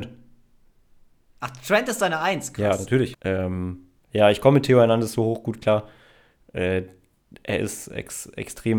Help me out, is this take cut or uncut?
cut